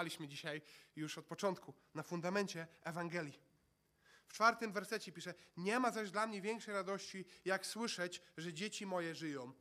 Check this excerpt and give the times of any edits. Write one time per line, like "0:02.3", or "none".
none